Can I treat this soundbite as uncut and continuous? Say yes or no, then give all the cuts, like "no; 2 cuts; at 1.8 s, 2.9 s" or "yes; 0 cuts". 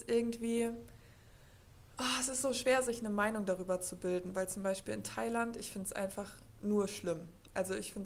yes; 0 cuts